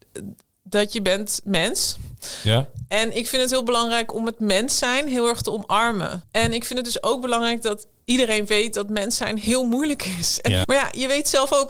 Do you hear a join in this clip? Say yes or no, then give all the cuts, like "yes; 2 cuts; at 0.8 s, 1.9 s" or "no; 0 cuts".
yes; 2 cuts; at 6.2 s, 10.6 s